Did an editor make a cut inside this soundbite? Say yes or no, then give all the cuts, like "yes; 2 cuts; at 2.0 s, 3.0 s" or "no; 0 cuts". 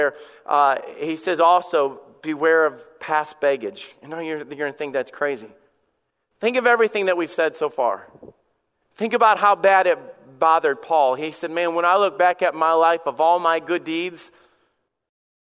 no; 0 cuts